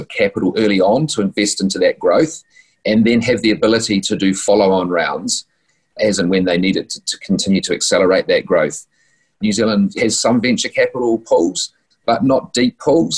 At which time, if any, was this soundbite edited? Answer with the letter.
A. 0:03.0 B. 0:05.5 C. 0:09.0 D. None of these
D